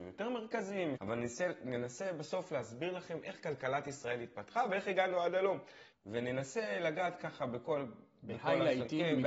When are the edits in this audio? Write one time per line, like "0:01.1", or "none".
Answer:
0:01.0
0:05.9